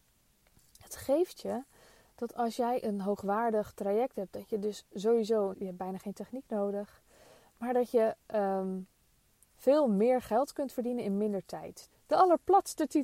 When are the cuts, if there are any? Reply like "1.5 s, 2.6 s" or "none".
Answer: 5.5 s, 11.9 s